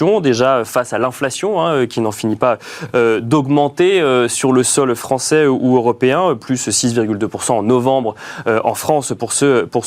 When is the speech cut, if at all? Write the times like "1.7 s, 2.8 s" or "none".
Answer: none

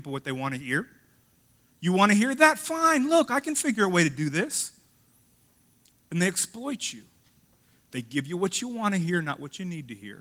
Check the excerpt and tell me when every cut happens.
none

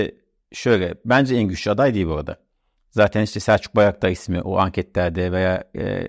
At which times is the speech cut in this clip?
none

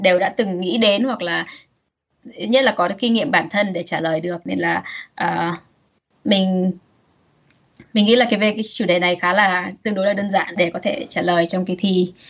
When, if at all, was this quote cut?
10.5 s

